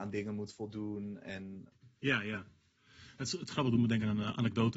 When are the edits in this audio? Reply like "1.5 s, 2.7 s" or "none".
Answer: none